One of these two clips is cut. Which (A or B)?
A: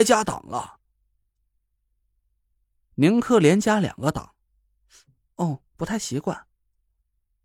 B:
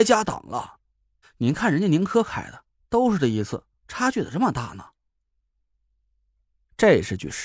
B